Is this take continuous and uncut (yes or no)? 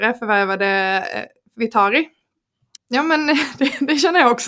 no